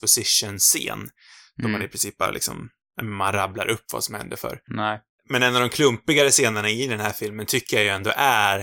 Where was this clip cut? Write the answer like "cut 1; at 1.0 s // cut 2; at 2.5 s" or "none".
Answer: cut 1; at 4.7 s